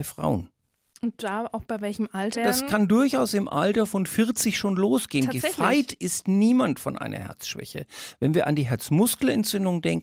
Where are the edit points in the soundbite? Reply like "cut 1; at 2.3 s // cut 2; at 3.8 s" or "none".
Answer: cut 1; at 2.3 s